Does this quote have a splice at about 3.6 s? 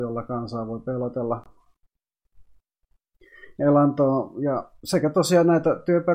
yes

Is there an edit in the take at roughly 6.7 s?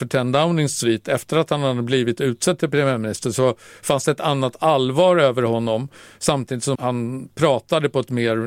yes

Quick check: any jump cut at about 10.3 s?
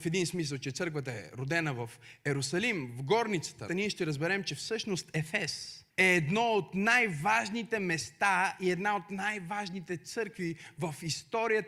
no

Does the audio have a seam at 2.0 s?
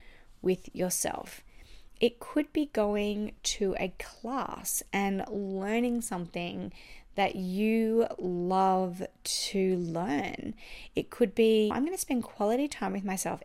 no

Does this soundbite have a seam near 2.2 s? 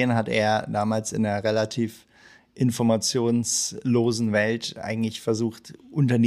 no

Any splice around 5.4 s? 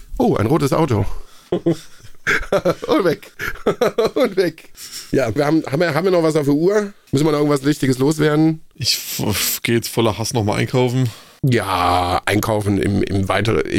yes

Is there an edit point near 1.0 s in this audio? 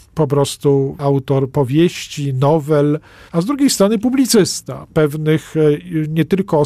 no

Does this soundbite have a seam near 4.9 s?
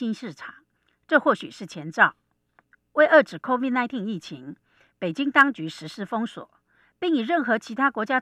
no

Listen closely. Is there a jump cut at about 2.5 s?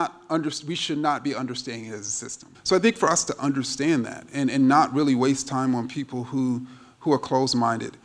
yes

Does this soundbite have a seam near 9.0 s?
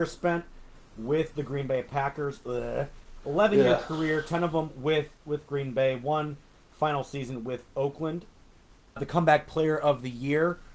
yes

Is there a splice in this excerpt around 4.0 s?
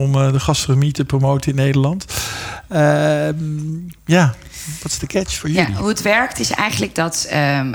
yes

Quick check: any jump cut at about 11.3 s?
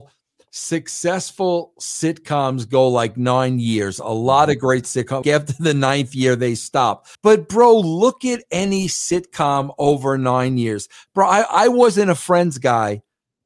no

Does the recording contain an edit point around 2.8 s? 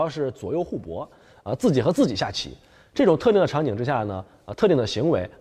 no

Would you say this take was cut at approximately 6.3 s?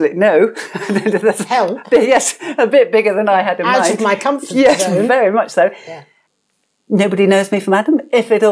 yes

